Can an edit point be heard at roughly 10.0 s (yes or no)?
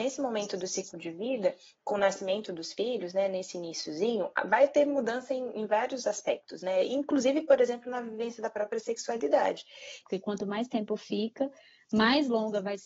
yes